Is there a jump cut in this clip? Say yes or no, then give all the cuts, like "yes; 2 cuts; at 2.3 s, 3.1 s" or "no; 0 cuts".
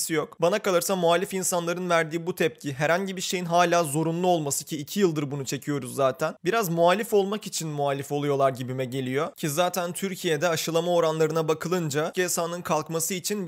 yes; 1 cut; at 12.1 s